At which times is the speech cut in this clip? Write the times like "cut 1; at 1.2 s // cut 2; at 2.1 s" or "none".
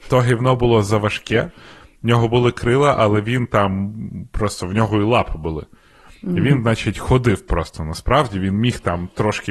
none